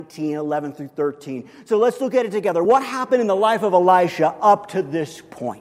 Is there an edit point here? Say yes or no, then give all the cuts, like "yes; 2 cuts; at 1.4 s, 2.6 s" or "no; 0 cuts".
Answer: no; 0 cuts